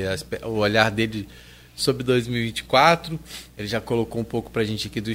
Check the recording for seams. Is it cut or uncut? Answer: uncut